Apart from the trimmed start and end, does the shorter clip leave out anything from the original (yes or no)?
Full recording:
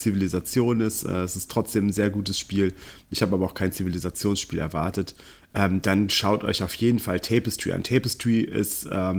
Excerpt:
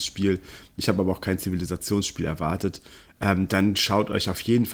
no